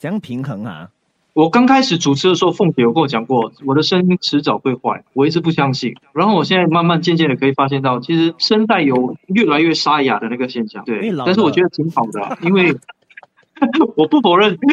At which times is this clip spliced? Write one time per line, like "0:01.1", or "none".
none

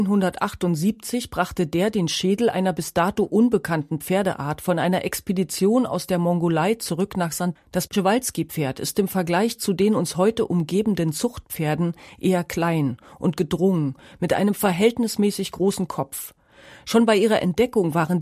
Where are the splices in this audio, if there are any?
0:07.6

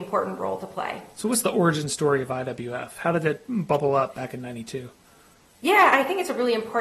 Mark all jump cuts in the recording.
none

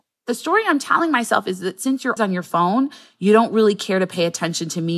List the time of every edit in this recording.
0:02.2

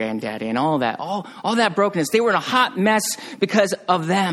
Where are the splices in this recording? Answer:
none

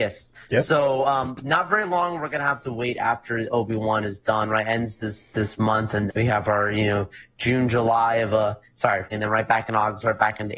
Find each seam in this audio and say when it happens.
0:06.1
0:09.1

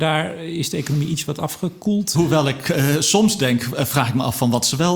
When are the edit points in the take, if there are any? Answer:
0:02.1

